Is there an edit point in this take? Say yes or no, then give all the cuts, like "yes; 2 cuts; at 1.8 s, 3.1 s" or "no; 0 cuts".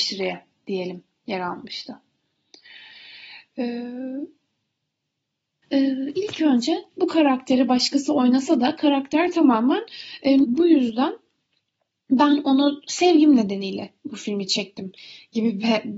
yes; 2 cuts; at 5.6 s, 10.4 s